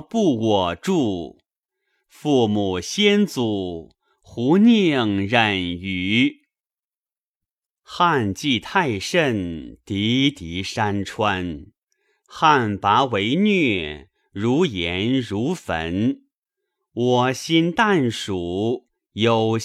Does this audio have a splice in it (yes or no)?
no